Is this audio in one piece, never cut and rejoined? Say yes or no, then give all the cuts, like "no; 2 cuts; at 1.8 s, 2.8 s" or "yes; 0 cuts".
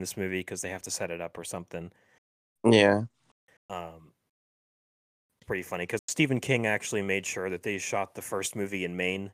no; 2 cuts; at 3.6 s, 6.0 s